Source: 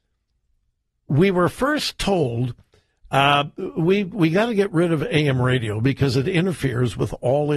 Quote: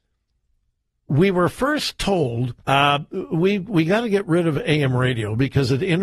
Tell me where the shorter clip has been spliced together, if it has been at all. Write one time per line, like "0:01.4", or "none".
0:02.6